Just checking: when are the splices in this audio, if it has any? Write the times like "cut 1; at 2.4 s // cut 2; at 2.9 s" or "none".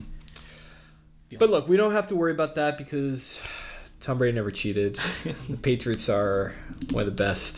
none